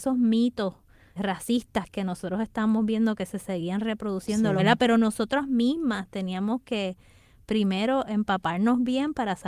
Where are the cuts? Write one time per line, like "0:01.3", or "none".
0:01.2
0:04.6